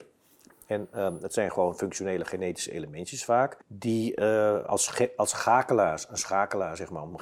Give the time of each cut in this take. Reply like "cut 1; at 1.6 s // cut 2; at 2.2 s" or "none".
cut 1; at 3.6 s